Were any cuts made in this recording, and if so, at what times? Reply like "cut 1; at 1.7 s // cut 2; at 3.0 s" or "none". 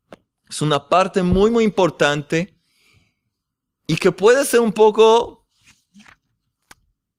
none